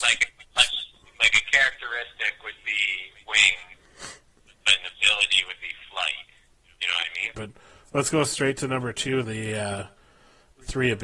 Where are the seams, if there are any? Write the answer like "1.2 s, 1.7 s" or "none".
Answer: 7.3 s, 9.2 s